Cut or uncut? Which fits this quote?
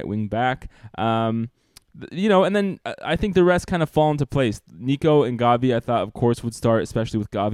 uncut